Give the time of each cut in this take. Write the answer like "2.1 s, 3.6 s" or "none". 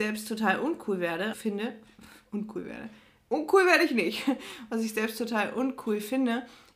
1.3 s